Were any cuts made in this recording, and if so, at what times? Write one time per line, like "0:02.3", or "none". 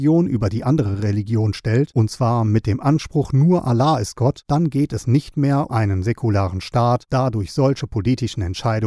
0:05.7